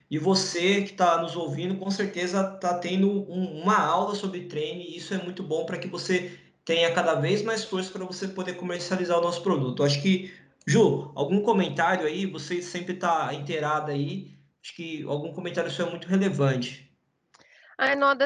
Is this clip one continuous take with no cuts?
yes; 0 cuts

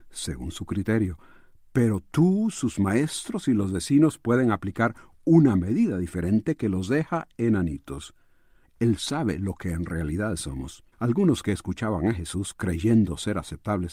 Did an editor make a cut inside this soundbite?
yes; 2 cuts; at 8.6 s, 10.9 s

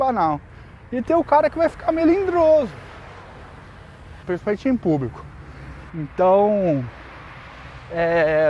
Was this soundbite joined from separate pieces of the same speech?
yes; 2 cuts; at 4.2 s, 5.9 s

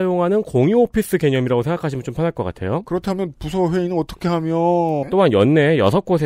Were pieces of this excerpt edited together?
yes; 1 cut; at 5.0 s

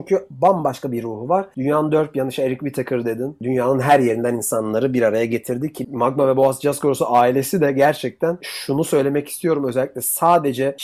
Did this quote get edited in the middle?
no; 0 cuts

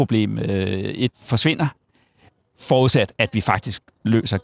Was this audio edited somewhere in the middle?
yes; 2 cuts; at 1.1 s, 3.1 s

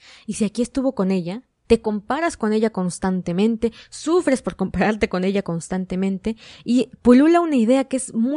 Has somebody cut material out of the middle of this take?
yes; 1 cut; at 1.6 s

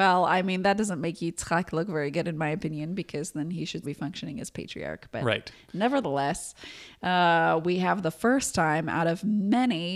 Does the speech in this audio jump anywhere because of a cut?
yes; 1 cut; at 3.8 s

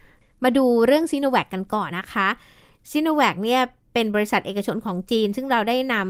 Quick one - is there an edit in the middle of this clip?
yes; 1 cut; at 1.9 s

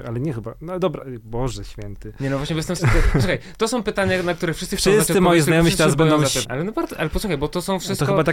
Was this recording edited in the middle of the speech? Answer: yes; 2 cuts; at 2.8 s, 6.4 s

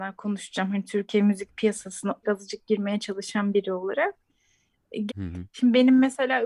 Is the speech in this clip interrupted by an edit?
yes; 2 cuts; at 2.2 s, 5.1 s

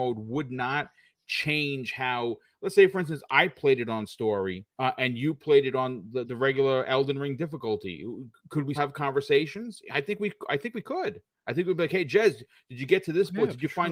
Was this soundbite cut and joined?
yes; 3 cuts; at 4.7 s, 6.3 s, 8.8 s

